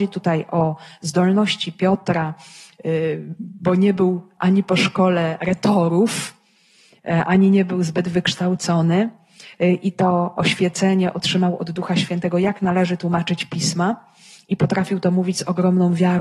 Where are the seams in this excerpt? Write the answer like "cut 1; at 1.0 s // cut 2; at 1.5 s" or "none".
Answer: none